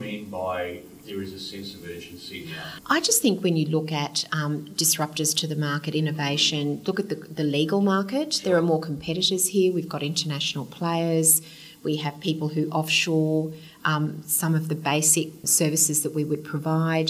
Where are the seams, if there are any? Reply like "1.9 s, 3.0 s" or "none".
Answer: 2.8 s, 15.4 s